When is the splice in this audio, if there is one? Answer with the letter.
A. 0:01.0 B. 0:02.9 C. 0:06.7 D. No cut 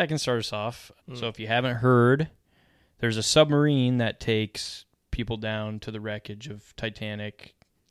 A